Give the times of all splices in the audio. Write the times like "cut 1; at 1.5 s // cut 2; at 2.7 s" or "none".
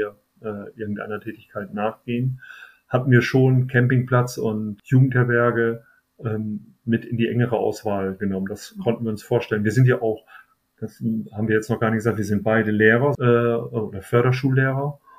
cut 1; at 13.1 s